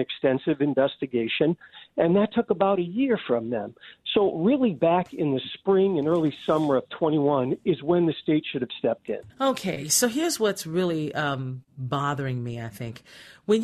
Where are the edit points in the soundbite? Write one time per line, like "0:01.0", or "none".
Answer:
0:09.3